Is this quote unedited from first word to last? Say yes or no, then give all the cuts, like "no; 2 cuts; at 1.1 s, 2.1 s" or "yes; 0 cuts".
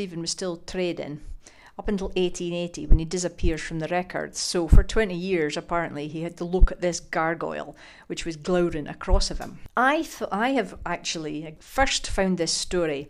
yes; 0 cuts